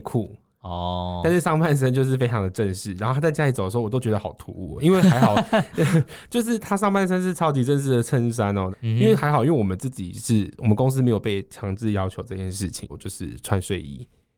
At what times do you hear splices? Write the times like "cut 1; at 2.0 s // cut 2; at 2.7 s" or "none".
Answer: cut 1; at 8.7 s // cut 2; at 12.9 s